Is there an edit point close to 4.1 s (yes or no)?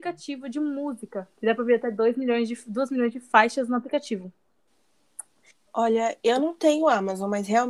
no